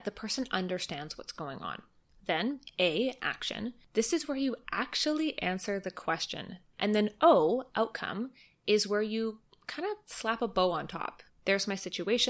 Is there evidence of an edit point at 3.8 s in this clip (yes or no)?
no